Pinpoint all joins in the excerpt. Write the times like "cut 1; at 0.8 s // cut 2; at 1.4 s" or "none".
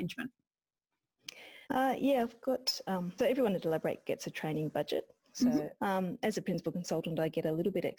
cut 1; at 1.6 s // cut 2; at 3.2 s // cut 3; at 5.8 s